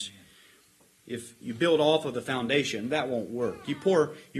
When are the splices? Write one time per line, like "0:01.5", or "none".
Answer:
none